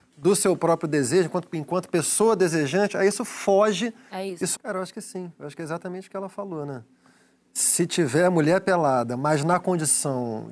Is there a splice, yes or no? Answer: yes